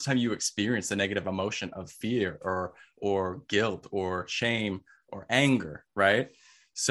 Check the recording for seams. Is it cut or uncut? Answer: uncut